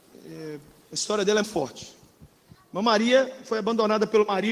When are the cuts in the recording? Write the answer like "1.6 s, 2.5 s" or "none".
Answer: 1.4 s